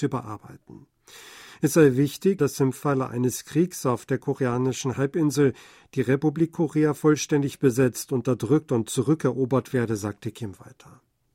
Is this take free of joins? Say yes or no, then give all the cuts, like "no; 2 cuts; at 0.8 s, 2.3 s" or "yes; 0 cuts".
no; 1 cut; at 2.4 s